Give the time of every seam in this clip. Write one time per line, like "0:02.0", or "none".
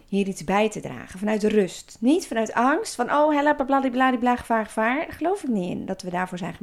0:04.4